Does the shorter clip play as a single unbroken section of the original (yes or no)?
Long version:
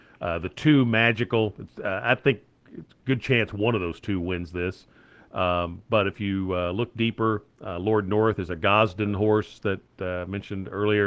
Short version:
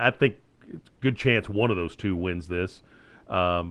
yes